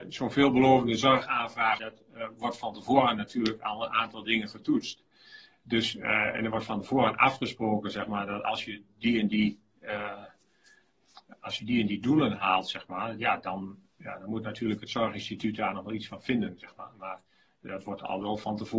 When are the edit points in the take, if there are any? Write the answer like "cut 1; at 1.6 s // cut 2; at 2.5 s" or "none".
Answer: cut 1; at 1.8 s